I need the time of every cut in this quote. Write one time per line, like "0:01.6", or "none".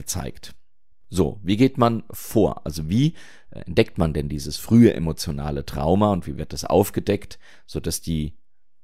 none